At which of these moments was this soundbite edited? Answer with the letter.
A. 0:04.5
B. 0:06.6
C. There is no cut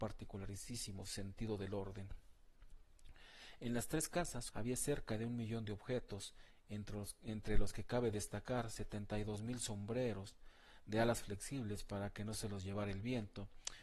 A